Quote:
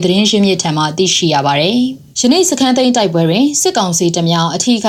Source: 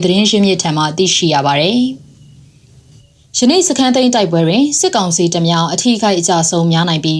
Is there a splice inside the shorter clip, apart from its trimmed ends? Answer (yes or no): yes